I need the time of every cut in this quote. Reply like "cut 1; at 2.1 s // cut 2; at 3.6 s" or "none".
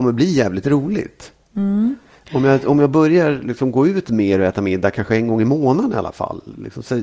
none